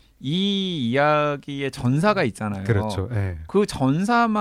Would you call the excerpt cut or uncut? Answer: uncut